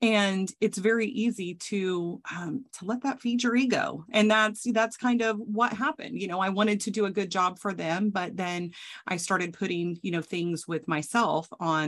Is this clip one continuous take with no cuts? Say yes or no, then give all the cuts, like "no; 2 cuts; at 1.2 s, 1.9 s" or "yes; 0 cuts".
yes; 0 cuts